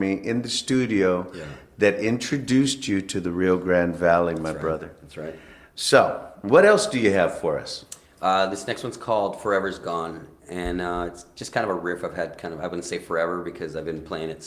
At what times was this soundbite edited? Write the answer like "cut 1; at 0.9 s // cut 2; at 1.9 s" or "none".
none